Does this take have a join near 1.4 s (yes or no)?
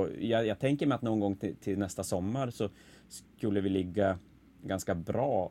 no